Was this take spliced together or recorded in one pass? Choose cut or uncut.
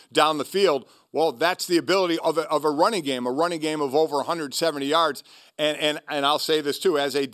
cut